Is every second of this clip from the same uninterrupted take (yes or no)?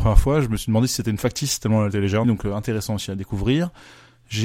no